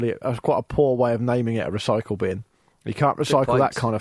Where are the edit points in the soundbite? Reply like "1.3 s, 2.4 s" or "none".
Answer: none